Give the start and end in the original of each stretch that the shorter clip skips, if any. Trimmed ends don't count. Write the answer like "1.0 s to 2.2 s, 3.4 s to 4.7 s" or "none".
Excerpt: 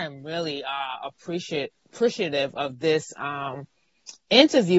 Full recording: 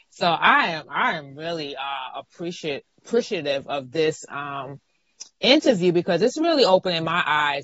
none